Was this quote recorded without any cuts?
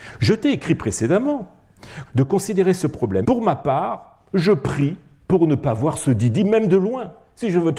no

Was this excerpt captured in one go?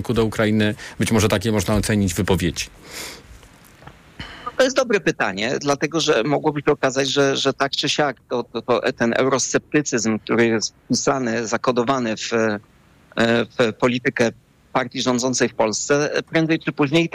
yes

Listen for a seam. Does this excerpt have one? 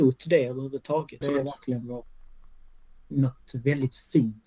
yes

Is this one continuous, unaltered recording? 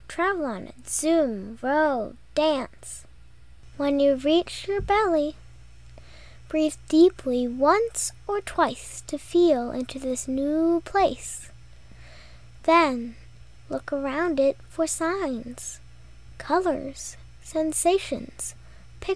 yes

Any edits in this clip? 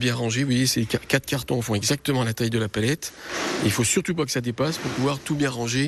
no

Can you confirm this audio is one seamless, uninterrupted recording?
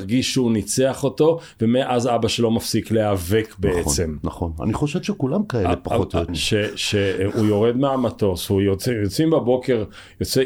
no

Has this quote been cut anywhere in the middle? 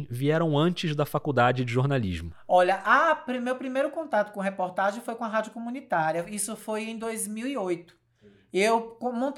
no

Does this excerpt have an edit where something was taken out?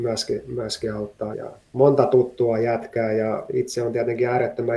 yes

